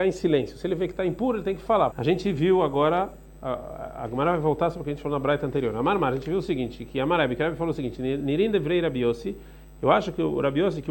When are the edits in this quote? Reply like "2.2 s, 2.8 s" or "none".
1.9 s